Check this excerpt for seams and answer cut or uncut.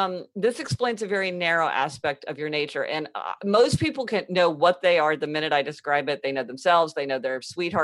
uncut